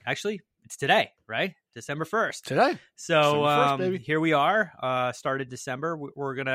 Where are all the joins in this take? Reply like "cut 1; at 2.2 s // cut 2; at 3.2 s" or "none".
none